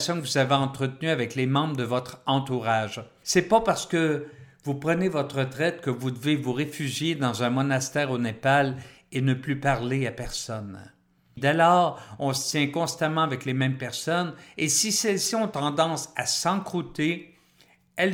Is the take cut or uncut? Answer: cut